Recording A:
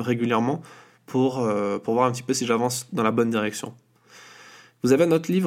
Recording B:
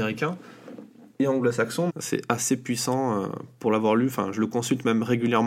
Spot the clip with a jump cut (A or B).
B